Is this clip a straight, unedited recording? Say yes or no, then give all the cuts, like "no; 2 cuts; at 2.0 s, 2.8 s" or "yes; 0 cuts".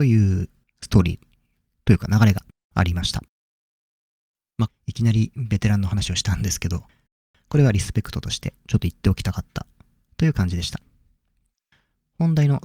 no; 1 cut; at 4.7 s